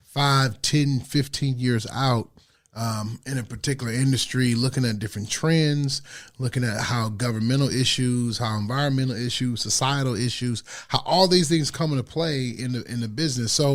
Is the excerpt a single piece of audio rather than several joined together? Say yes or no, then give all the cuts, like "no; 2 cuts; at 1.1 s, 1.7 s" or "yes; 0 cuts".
yes; 0 cuts